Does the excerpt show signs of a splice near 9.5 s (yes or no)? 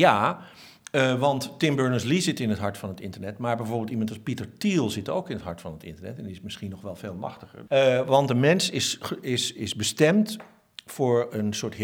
yes